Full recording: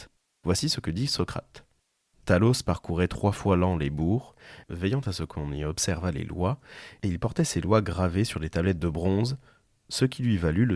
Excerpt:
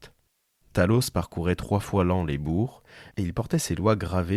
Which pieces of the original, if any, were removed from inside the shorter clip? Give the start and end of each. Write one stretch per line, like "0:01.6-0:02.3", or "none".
0:04.7-0:07.0